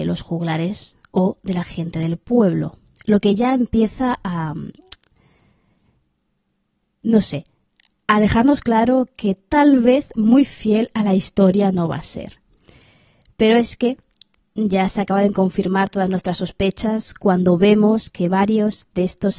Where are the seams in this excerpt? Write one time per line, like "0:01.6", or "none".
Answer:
none